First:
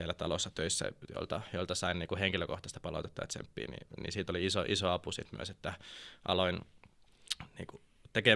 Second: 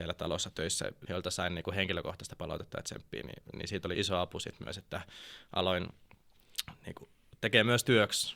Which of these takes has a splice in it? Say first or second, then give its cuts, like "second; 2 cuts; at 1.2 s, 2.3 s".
second; 2 cuts; at 1.1 s, 3.9 s